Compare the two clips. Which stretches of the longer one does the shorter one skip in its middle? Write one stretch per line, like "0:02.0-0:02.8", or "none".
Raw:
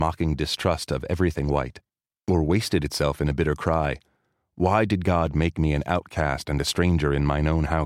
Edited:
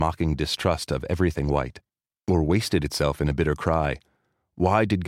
none